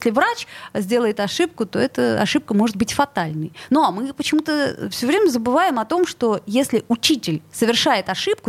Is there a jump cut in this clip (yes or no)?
no